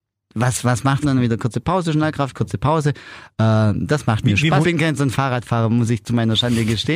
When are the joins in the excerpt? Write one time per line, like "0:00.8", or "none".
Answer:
0:01.0
0:04.6